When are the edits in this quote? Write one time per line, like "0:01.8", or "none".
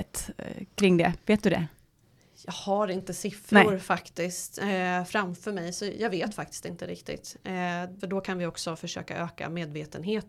0:08.0